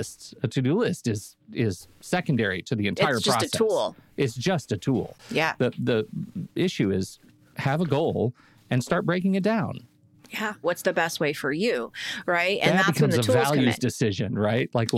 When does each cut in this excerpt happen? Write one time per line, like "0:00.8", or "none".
0:10.6